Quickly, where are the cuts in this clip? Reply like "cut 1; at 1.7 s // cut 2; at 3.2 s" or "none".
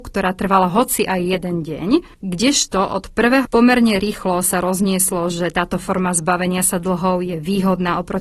cut 1; at 2.1 s // cut 2; at 3.5 s